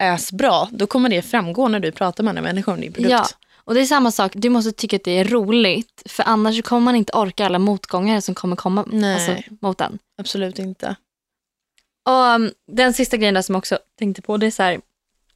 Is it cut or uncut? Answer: cut